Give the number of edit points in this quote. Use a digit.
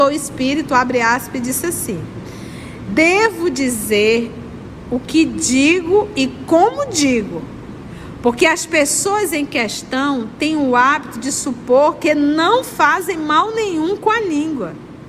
1